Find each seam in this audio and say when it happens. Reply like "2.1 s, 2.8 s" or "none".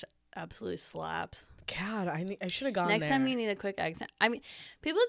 none